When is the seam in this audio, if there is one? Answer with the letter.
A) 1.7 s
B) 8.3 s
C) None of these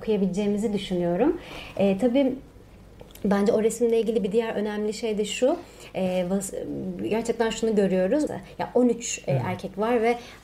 B